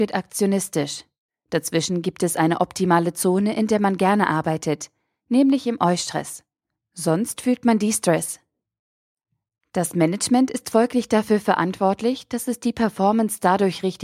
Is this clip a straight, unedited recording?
yes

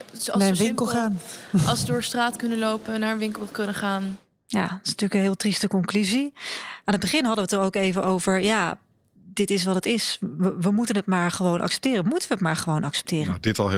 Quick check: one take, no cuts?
yes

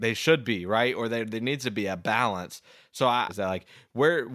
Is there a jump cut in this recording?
yes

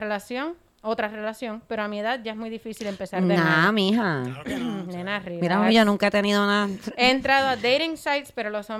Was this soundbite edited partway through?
no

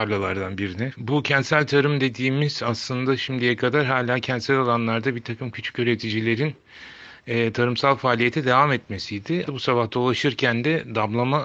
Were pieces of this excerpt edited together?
yes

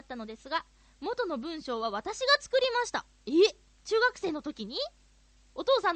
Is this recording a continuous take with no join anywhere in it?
yes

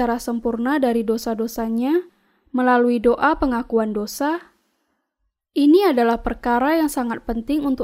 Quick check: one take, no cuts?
yes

